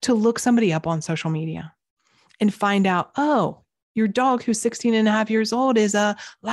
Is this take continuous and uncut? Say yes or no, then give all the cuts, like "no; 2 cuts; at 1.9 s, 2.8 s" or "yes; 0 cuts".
yes; 0 cuts